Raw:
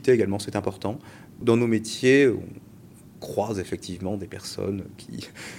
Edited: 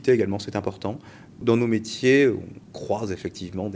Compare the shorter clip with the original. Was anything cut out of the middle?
yes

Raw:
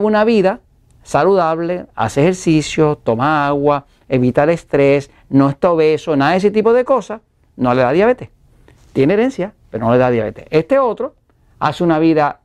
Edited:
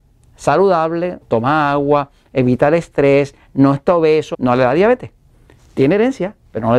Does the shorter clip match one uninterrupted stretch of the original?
no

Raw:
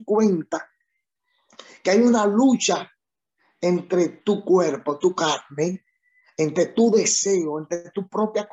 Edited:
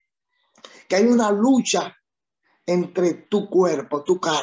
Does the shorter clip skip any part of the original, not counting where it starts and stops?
no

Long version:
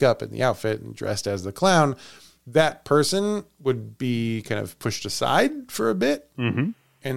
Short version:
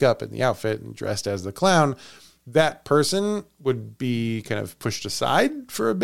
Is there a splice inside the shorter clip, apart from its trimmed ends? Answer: no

